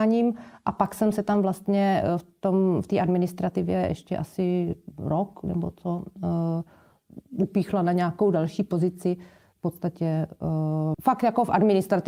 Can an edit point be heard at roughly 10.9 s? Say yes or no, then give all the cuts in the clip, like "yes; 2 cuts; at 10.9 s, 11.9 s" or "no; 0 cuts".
yes; 1 cut; at 10.9 s